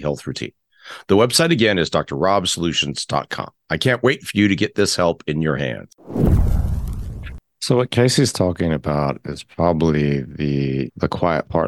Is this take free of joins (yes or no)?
yes